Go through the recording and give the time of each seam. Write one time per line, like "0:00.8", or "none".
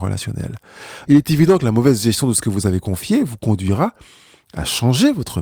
0:01.1